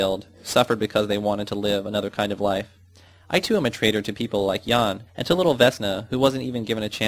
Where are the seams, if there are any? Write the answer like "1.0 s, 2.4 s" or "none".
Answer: 5.1 s